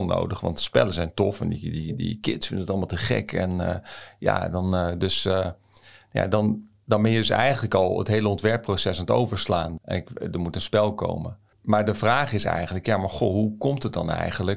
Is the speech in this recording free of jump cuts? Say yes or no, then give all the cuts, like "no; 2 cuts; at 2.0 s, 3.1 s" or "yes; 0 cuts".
no; 1 cut; at 9.8 s